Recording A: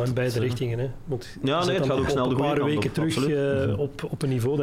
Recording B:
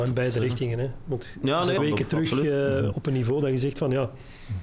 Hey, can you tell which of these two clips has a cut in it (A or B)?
B